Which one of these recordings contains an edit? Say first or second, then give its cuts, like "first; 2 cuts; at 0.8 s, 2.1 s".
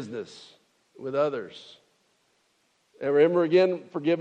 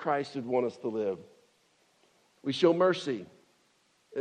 second; 1 cut; at 2.4 s